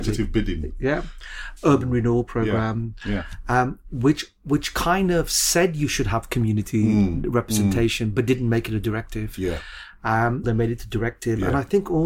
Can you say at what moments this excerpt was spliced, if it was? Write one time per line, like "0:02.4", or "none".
0:10.4